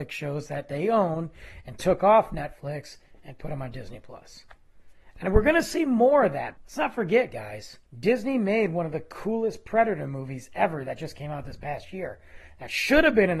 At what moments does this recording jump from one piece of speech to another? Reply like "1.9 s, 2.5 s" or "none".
6.6 s, 7.9 s